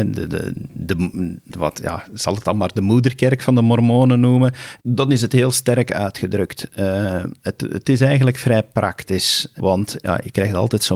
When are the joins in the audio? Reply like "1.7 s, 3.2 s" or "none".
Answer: 4.8 s, 9.6 s